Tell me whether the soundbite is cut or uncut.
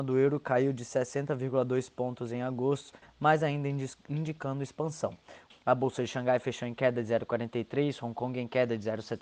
cut